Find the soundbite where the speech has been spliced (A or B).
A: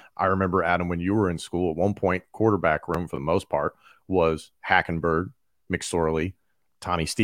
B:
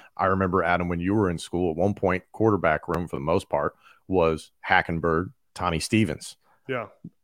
B